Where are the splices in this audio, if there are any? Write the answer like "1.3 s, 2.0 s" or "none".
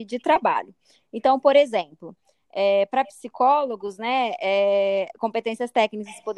none